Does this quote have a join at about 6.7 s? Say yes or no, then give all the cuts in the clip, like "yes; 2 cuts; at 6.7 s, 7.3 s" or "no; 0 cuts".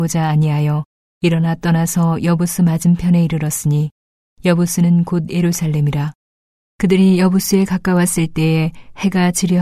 yes; 1 cut; at 6.7 s